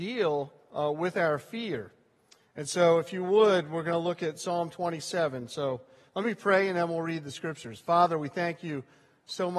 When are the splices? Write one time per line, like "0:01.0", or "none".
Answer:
none

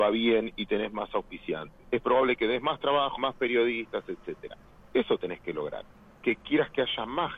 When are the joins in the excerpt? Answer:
0:01.9
0:03.2

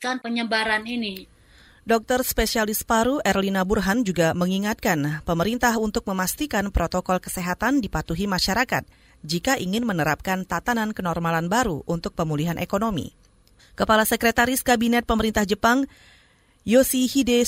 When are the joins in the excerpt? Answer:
0:13.6

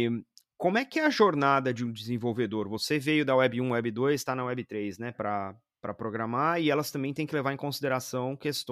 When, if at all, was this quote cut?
0:05.1

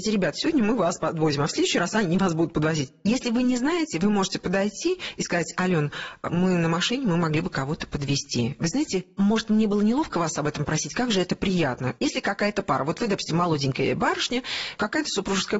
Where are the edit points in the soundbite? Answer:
0:12.0

